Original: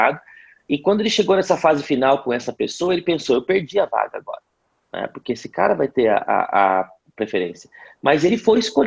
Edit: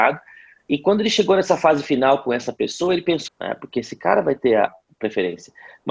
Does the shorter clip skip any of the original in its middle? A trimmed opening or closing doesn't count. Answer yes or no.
yes